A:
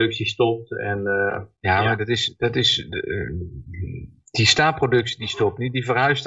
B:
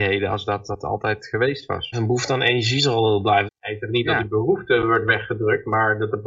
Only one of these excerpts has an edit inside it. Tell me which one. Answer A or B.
B